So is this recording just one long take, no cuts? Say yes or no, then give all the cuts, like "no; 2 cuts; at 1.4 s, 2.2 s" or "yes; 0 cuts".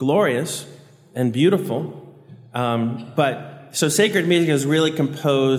yes; 0 cuts